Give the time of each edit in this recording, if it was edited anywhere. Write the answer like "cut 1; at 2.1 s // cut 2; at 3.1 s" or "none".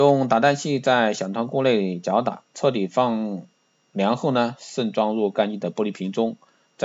cut 1; at 2.5 s